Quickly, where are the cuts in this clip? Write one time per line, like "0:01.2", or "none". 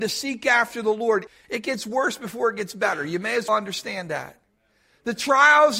0:03.5